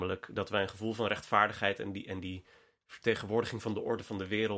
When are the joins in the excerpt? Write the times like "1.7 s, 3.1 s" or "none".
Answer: none